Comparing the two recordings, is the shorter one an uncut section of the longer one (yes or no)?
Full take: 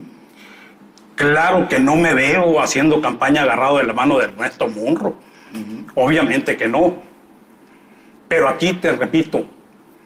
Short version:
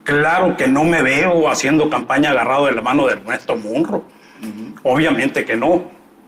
yes